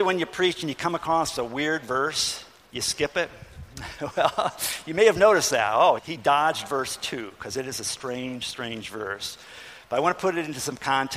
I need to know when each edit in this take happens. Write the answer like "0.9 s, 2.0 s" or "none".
6.0 s

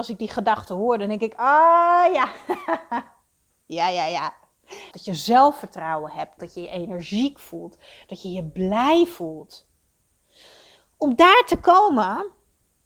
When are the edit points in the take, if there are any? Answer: 4.9 s, 6.4 s

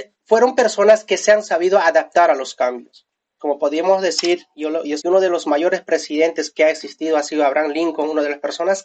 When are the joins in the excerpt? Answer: 3.4 s, 5.0 s

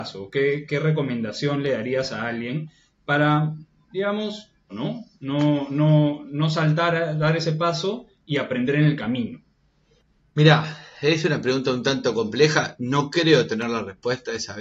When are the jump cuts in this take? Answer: 4.7 s

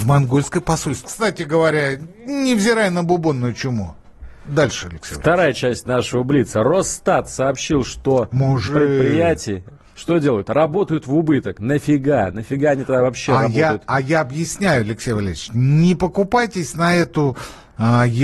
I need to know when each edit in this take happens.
1.0 s, 8.7 s

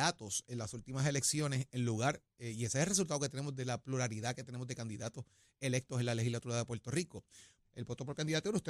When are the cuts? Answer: 7.6 s

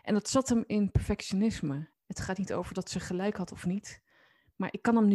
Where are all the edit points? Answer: 1.9 s

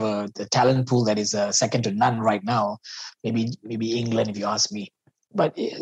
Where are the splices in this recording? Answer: none

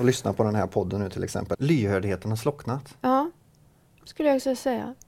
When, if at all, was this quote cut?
1.5 s

